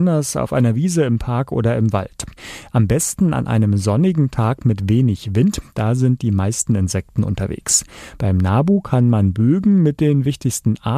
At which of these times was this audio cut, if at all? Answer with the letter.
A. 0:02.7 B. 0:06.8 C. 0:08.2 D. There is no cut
D